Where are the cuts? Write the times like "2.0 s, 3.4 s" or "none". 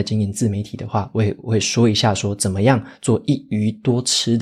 none

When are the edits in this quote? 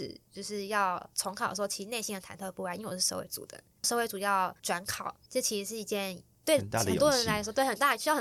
none

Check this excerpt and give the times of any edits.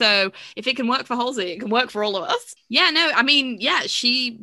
2.6 s

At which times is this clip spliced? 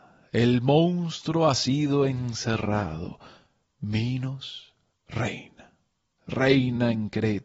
none

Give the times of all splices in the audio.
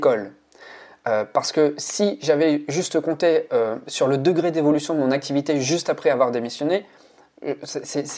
none

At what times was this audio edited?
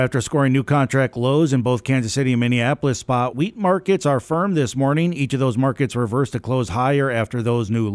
3.3 s

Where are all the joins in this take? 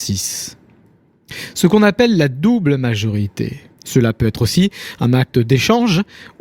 3.7 s

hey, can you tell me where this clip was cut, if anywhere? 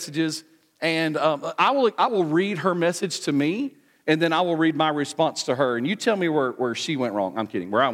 none

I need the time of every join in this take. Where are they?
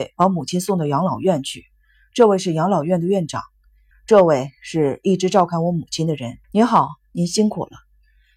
3.9 s, 6.4 s

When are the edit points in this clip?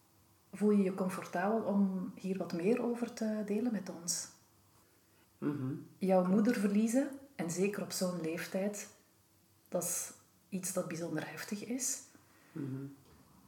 5.2 s

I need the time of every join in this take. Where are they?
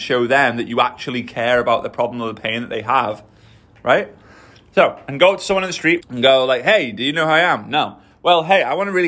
6.0 s

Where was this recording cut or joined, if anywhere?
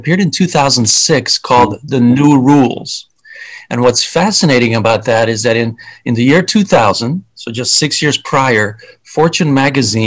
none

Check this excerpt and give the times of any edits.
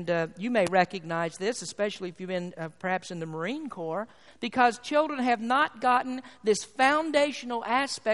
4.3 s

